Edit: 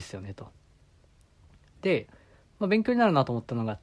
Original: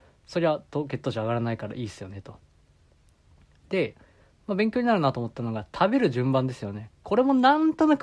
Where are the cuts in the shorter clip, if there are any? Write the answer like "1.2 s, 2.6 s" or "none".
none